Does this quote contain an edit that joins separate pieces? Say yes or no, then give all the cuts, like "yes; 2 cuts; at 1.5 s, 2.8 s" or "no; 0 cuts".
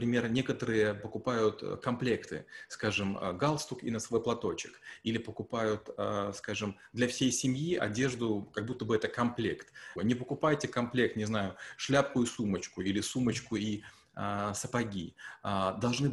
yes; 1 cut; at 10.0 s